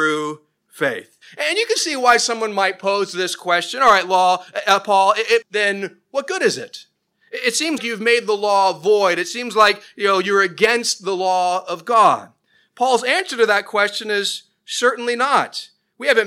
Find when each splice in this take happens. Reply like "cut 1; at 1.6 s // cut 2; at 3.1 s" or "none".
cut 1; at 5.4 s // cut 2; at 7.8 s